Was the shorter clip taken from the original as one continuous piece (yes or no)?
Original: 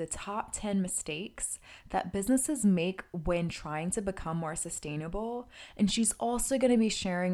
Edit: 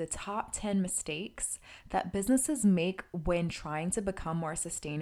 yes